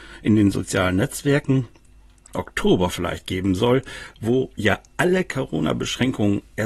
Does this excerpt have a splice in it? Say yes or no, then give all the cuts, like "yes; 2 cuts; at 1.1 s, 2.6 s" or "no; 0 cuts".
yes; 1 cut; at 2.3 s